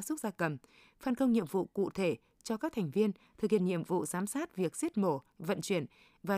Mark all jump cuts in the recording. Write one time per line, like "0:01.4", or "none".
none